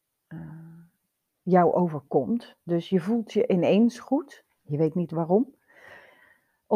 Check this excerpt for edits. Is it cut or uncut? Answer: uncut